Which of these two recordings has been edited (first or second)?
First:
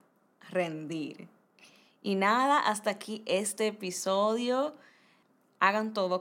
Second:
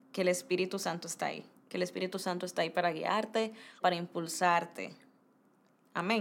second